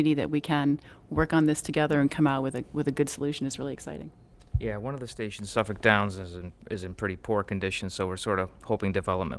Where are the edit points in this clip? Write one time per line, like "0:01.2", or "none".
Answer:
none